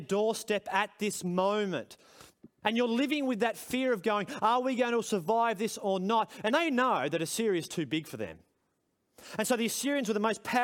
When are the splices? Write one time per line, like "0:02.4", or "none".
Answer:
0:02.6